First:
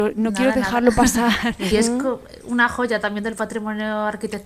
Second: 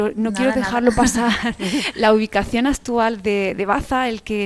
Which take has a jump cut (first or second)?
first